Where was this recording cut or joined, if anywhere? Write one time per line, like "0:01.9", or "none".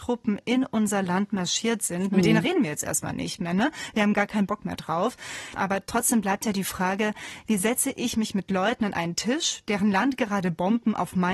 0:05.6